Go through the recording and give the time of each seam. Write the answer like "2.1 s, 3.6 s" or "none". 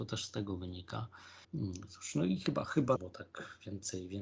1.4 s, 3.0 s